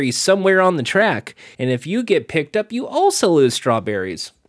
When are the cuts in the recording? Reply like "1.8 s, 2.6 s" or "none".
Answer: 1.5 s